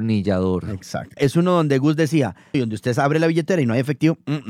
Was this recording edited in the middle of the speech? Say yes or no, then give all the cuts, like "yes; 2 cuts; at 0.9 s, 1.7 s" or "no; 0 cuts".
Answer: yes; 2 cuts; at 1.2 s, 2.5 s